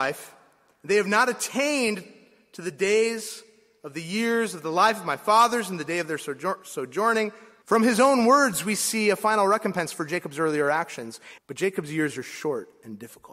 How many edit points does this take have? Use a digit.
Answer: 2